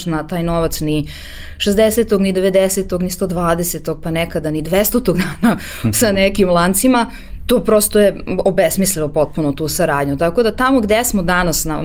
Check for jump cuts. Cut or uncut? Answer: uncut